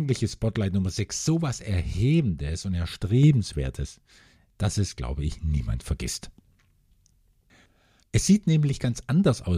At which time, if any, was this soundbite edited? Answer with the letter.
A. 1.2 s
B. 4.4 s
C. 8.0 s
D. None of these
C